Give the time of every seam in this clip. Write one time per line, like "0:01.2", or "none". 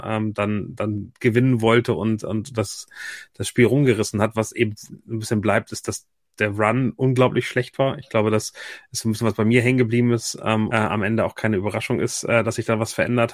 0:10.7